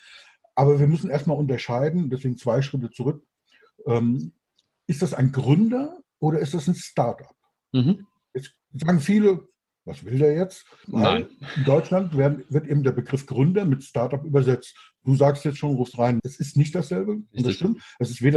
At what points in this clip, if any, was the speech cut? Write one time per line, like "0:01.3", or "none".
0:10.8
0:16.2

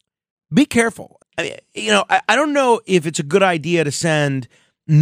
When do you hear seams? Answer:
0:01.2

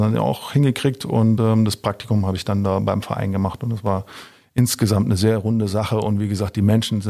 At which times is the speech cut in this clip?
none

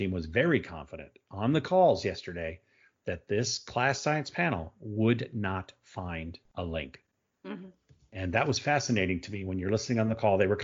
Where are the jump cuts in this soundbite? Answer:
none

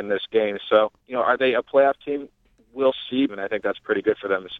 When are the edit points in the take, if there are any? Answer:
0:01.0
0:03.3

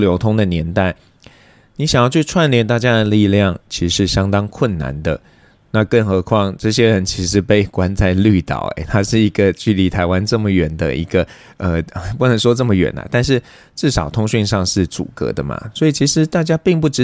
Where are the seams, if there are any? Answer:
none

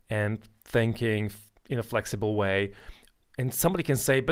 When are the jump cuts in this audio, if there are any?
none

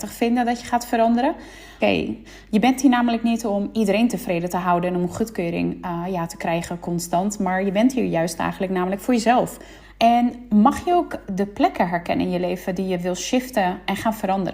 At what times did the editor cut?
0:01.8
0:09.8

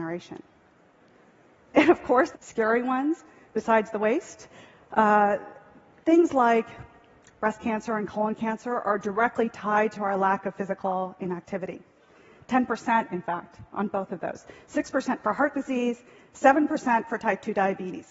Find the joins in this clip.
0:02.3

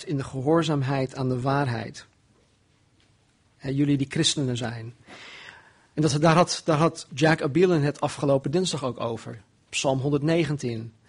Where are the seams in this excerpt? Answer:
0:05.9
0:07.1

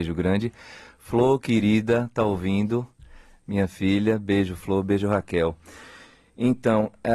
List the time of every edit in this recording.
none

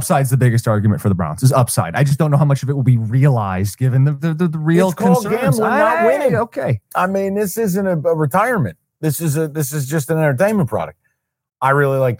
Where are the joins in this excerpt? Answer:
none

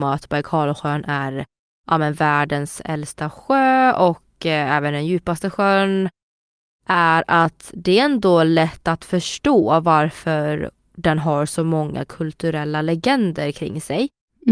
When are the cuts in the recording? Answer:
none

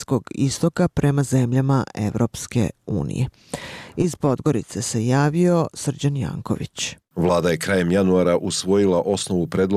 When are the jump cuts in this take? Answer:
none

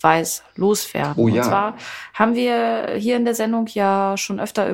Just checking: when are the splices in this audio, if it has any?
none

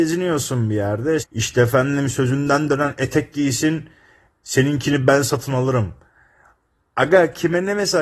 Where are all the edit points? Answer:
0:01.2

